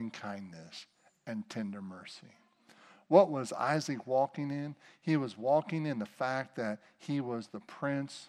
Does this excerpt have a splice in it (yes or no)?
no